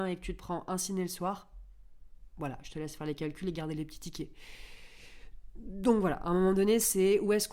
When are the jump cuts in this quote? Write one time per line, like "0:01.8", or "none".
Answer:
none